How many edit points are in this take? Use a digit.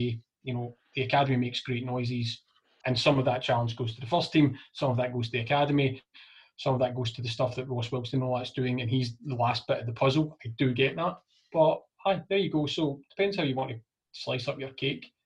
1